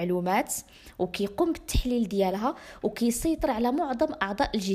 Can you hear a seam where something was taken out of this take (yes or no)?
no